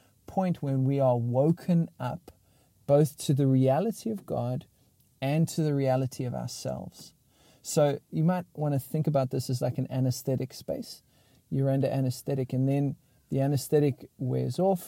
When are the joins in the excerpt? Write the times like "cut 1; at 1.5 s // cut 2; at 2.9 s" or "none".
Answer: none